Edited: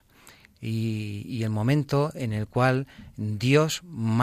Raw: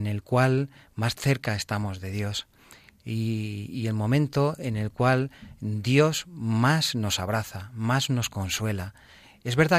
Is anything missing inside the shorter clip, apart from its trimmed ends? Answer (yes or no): no